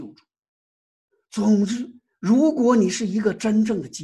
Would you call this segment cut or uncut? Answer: uncut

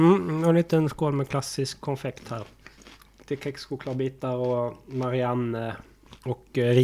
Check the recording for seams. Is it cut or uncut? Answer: uncut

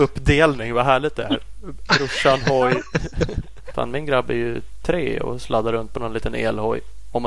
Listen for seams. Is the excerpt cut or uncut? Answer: cut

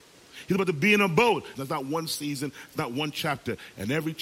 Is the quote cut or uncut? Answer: cut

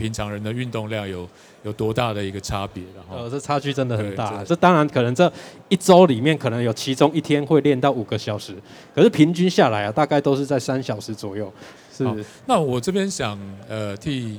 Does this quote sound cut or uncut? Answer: cut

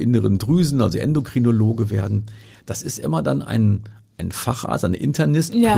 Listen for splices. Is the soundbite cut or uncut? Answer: uncut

